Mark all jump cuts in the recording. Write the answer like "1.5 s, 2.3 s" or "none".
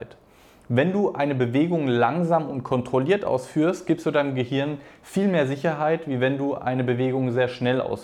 none